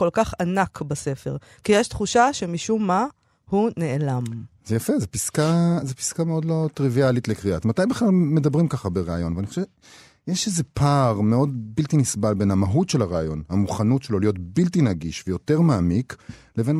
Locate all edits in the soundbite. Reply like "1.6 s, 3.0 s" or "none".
7.6 s